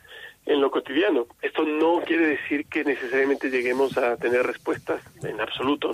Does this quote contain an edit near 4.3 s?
no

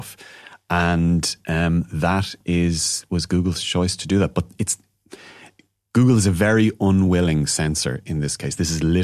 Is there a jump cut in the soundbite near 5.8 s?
no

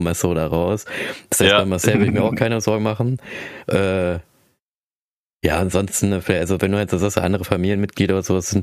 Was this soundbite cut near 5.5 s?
no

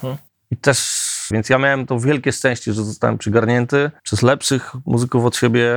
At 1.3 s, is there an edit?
yes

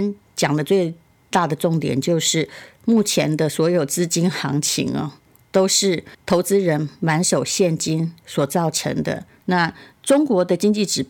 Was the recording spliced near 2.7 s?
no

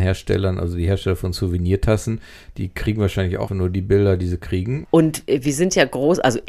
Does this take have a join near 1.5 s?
no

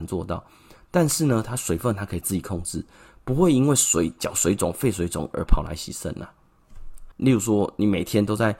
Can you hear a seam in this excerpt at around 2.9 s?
no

